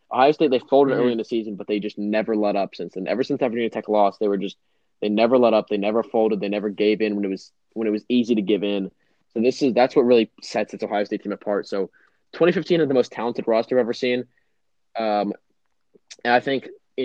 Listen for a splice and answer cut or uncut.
uncut